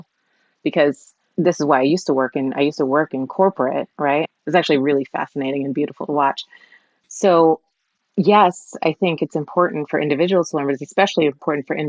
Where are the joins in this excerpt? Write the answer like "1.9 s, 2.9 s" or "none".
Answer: 4.2 s, 7.0 s